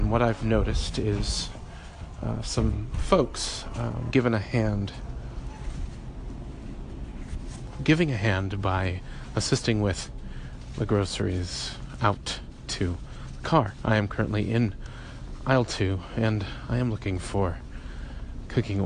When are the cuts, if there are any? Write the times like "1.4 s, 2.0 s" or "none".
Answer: 4.1 s